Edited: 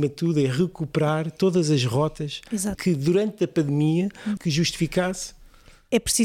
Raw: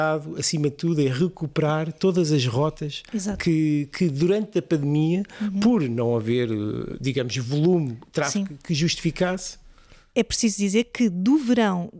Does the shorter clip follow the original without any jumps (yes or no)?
no